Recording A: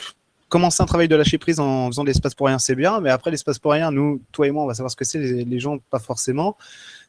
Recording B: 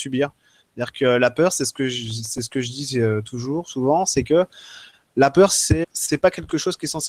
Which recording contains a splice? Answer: B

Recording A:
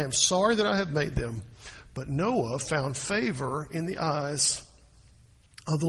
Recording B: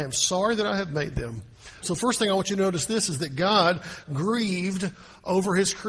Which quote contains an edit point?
B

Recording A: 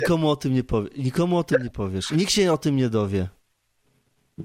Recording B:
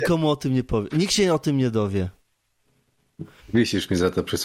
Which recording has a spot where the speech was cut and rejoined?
B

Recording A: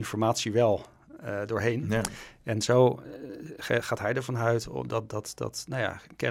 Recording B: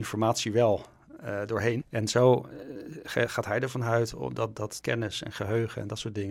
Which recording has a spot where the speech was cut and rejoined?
B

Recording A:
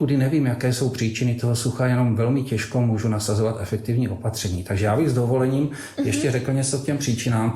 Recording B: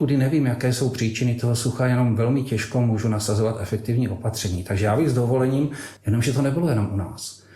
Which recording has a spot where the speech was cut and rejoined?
B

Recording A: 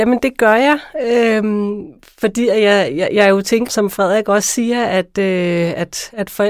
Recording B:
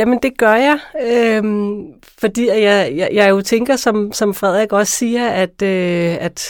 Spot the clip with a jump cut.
A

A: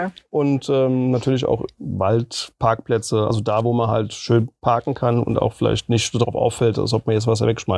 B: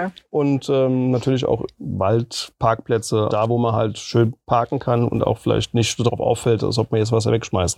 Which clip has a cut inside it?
B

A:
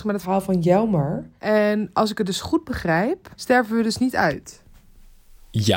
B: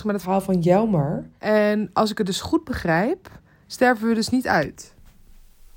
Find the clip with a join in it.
A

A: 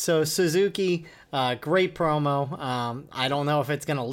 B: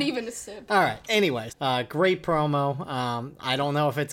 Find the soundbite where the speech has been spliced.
B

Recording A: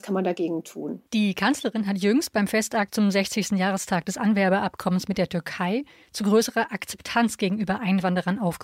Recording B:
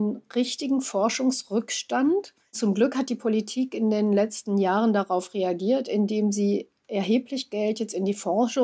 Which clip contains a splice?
A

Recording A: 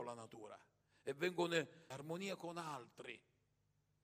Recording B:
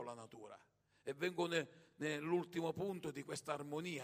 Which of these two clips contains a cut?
A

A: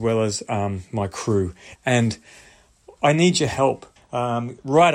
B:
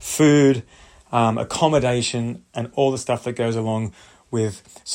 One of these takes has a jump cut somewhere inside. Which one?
A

